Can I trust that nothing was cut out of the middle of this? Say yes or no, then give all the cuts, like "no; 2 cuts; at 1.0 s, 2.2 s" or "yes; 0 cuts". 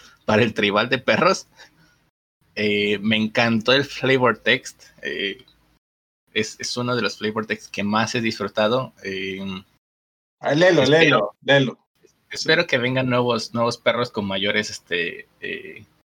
yes; 0 cuts